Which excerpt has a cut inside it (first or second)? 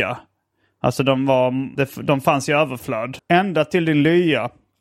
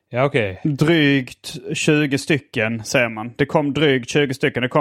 first